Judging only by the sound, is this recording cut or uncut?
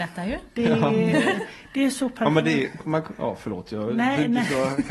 cut